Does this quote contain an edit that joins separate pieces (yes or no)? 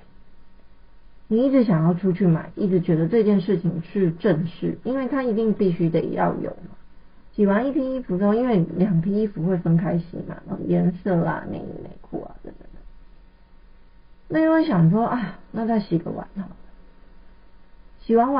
yes